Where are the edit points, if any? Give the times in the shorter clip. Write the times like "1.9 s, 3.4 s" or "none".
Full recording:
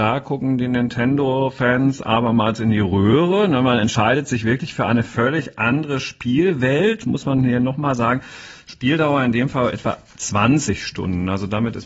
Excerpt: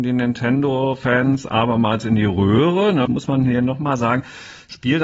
3.1 s

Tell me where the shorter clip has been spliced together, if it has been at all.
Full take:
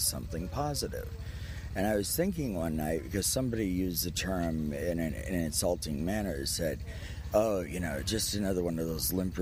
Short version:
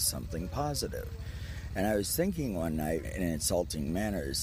3.0 s

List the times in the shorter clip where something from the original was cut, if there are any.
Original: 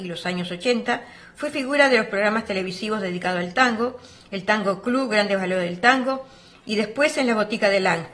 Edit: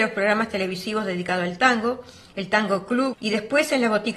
3.1 s

